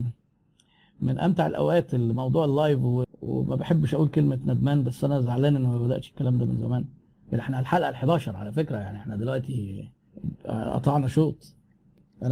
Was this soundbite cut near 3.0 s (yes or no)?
yes